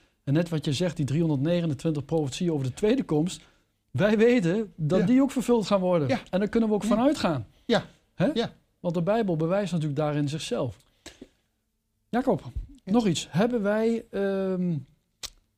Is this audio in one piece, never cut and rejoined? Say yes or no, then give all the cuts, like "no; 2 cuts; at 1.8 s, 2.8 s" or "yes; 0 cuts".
yes; 0 cuts